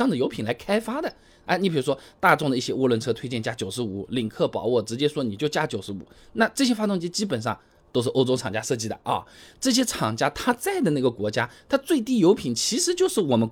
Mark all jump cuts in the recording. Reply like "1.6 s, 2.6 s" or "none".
none